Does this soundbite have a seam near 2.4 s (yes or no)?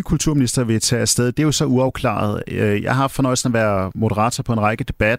no